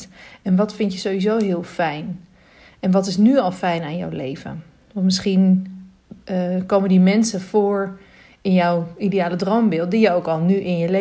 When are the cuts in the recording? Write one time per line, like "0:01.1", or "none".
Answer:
none